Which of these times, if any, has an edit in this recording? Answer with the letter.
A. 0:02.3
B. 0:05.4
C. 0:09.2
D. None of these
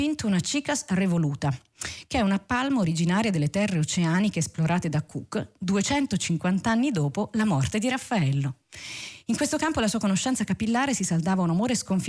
D